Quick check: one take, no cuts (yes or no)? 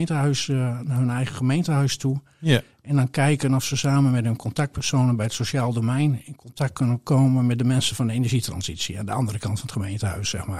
yes